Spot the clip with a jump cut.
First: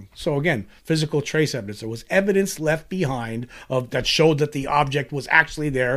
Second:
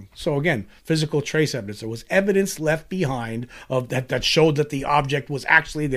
first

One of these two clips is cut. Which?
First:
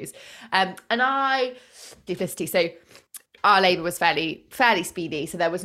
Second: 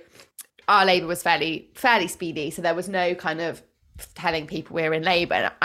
first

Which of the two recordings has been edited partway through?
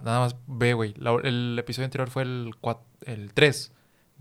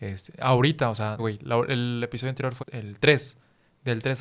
second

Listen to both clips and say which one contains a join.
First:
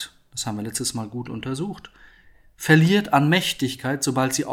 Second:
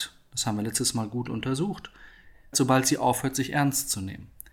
second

